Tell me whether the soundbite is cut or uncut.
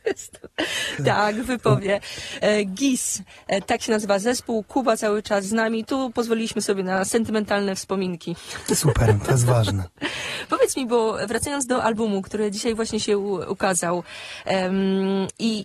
cut